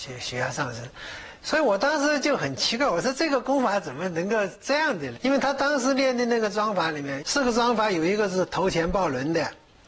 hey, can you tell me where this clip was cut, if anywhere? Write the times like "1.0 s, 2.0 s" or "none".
5.2 s, 7.2 s